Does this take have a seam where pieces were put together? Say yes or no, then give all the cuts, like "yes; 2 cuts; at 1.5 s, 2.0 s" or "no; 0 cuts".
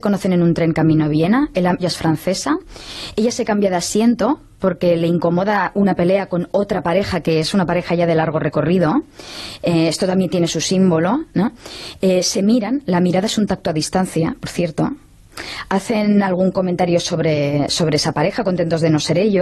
yes; 1 cut; at 1.8 s